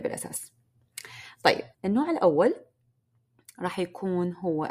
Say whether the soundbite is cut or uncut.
cut